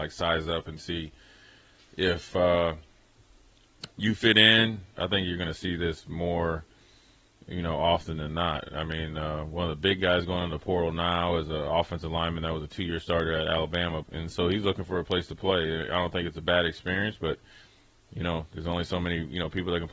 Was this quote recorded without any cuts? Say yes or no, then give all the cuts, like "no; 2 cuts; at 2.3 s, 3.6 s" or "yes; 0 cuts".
no; 2 cuts; at 4.9 s, 14.0 s